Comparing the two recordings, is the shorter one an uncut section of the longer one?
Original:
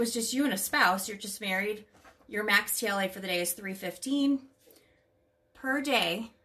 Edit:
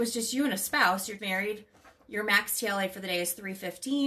no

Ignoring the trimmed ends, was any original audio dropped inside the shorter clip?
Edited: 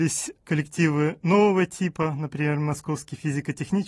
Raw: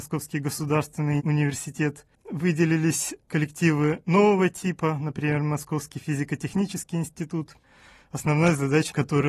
no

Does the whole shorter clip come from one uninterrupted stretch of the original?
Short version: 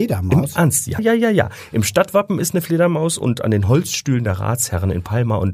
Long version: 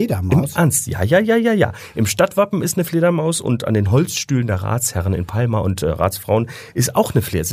no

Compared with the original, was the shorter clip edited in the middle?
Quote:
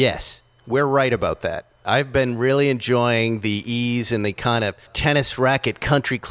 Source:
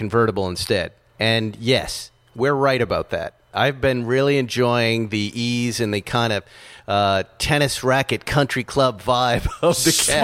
yes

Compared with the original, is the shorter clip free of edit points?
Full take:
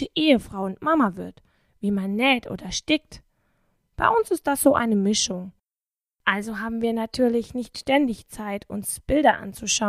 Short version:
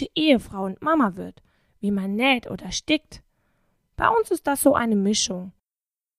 yes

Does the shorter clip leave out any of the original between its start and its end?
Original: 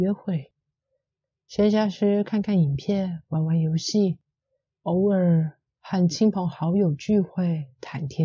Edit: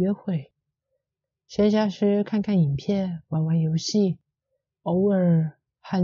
no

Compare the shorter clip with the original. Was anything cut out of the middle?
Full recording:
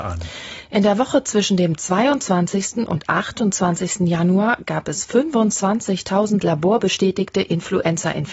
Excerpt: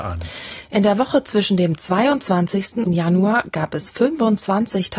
yes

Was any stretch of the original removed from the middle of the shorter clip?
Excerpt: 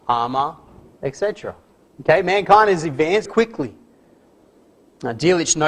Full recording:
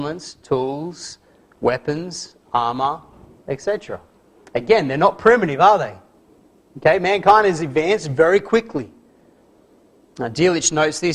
yes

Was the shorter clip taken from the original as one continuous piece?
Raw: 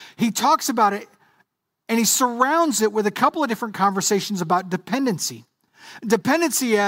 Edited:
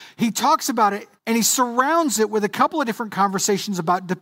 no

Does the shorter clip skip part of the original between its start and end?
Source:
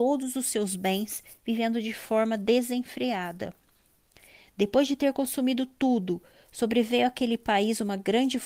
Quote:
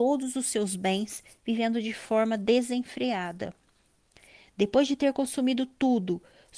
no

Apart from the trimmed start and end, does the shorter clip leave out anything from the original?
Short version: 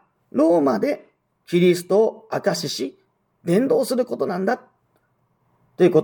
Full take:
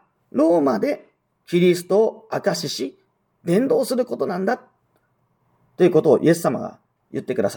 no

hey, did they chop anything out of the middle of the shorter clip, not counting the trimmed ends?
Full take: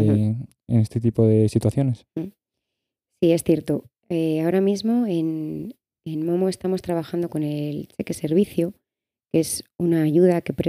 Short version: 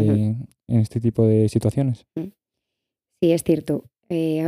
no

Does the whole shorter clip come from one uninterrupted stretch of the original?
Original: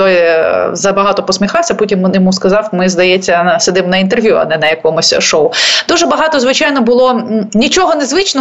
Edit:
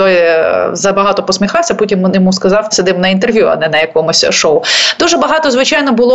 no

